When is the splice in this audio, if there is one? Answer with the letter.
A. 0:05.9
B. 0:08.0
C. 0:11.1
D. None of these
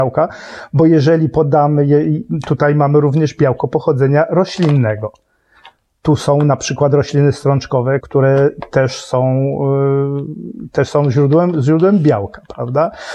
B